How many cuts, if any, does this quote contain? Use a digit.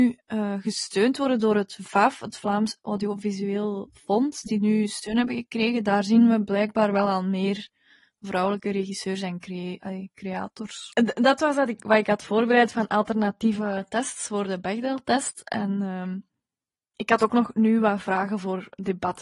1